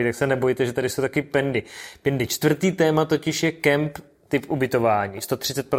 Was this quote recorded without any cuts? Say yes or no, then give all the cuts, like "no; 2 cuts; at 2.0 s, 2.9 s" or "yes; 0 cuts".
yes; 0 cuts